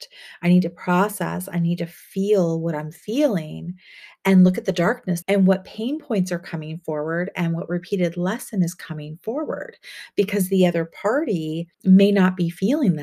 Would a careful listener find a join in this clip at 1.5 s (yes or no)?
no